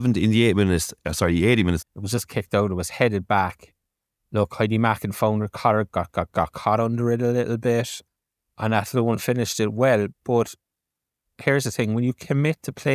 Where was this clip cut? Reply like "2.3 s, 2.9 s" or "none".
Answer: 1.8 s